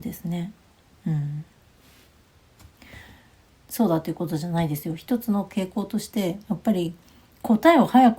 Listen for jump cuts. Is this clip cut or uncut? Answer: cut